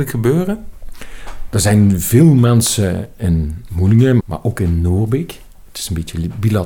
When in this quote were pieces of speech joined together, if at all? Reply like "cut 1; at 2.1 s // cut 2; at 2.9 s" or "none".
cut 1; at 4.2 s